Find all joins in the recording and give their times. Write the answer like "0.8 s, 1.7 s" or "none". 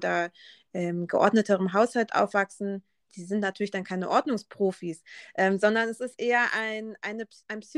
none